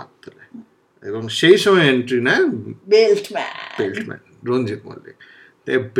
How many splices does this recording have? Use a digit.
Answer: 1